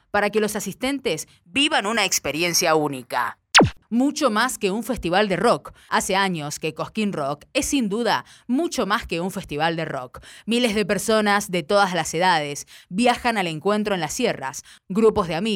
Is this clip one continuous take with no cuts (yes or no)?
yes